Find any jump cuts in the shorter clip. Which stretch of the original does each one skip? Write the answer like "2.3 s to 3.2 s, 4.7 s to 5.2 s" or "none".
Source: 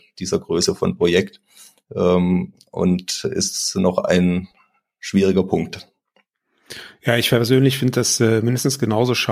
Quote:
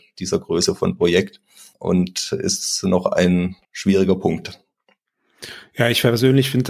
1.7 s to 2.7 s, 4.6 s to 4.9 s